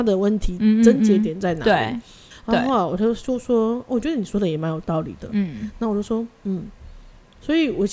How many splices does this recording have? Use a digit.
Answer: 1